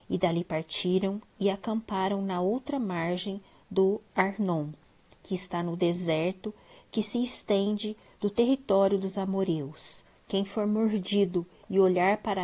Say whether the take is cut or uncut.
cut